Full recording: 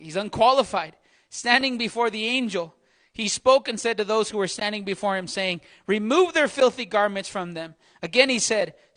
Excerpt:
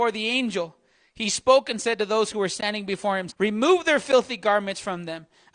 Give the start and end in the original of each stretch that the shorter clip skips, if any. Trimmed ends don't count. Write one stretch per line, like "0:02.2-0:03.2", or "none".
0:05.3-0:05.8